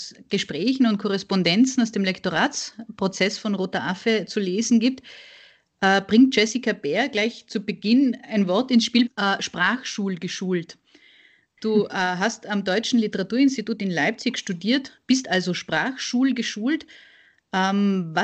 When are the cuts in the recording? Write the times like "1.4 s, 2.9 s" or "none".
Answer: 9.1 s